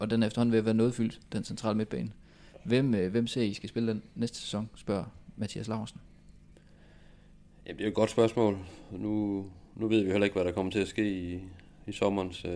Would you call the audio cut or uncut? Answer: uncut